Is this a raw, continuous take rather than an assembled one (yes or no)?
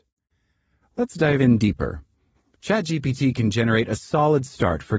yes